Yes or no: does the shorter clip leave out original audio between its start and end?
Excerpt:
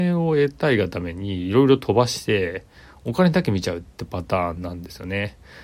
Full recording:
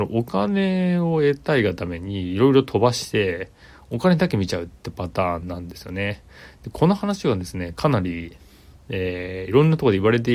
no